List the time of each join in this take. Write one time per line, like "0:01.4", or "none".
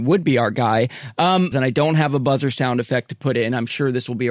0:01.5